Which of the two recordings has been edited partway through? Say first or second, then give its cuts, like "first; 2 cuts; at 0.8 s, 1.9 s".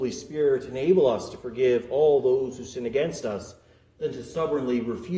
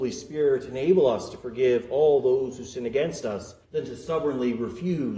second; 1 cut; at 3.6 s